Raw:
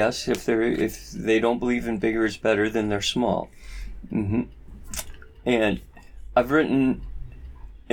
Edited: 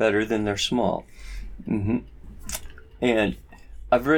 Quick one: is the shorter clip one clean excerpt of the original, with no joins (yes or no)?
yes